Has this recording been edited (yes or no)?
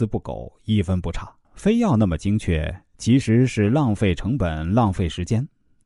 yes